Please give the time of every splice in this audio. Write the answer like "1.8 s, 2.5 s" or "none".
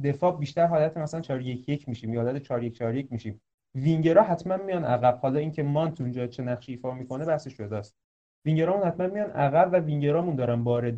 1.2 s